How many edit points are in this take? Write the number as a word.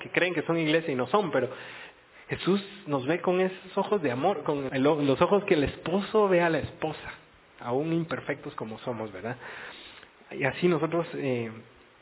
one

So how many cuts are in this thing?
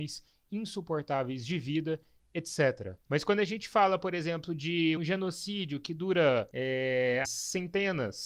three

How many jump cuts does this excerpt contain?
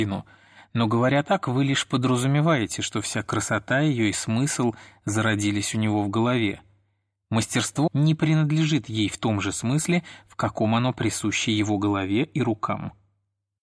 one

